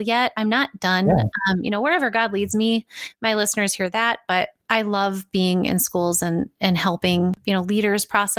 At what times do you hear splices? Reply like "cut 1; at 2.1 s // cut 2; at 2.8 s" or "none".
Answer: none